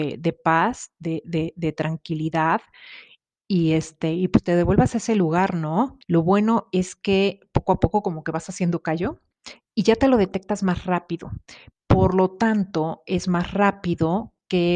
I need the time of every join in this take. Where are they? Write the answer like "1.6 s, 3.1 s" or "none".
6.0 s